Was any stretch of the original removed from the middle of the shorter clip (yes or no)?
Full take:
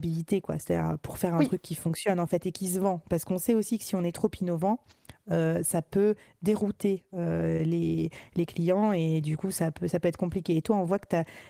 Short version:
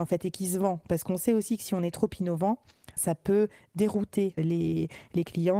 yes